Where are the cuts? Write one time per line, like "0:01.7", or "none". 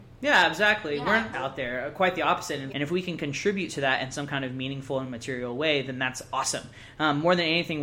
0:01.3
0:02.7